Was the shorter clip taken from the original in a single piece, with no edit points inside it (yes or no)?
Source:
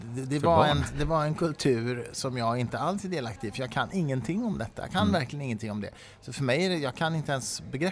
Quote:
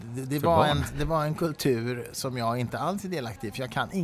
yes